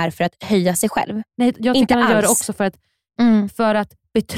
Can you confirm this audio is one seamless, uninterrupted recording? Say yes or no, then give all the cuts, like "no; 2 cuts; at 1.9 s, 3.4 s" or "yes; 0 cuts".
no; 1 cut; at 3.2 s